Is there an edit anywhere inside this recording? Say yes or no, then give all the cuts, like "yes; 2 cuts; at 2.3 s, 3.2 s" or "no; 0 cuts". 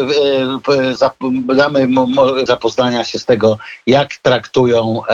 yes; 2 cuts; at 1.0 s, 2.5 s